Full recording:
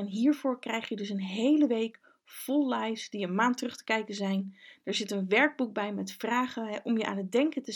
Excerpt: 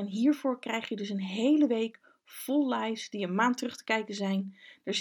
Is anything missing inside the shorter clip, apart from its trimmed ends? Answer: no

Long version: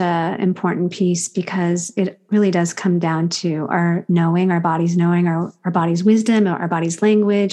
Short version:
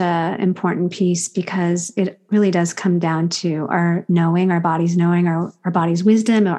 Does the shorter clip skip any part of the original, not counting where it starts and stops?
no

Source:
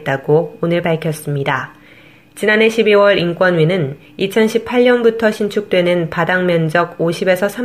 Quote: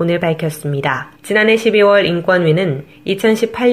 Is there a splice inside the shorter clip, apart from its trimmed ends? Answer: yes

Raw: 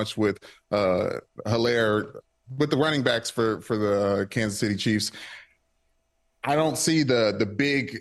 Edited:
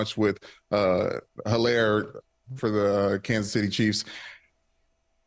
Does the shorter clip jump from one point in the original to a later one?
yes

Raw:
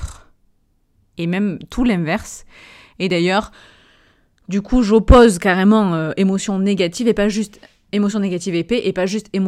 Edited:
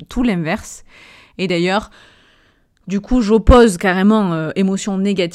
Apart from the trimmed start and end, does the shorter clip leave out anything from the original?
no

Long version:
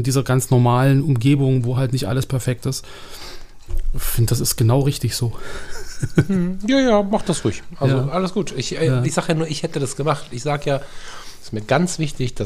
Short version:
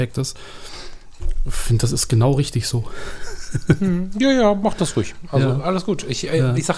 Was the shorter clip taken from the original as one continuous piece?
yes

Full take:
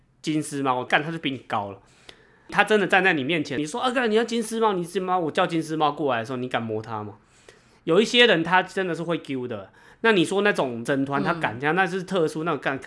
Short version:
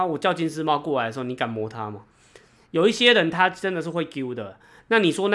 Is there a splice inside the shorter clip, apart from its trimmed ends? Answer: no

